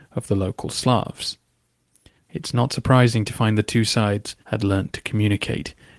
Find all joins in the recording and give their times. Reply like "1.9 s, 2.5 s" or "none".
2.2 s, 4.4 s